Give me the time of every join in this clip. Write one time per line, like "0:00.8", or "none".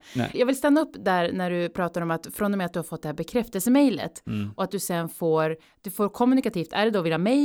none